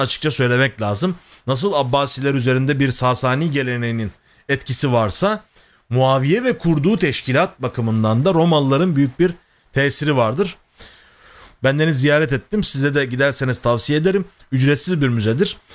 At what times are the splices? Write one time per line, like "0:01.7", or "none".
0:11.5